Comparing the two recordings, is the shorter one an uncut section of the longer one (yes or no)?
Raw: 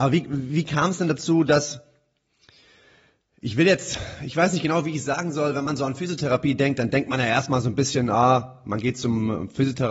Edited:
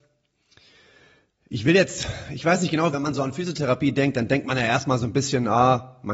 no